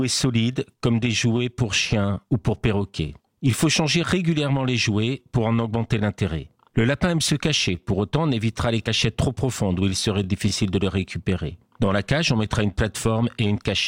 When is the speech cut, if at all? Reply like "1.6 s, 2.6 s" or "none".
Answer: none